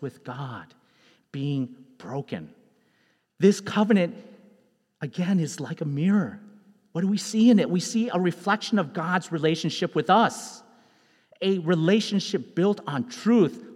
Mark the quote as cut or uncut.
uncut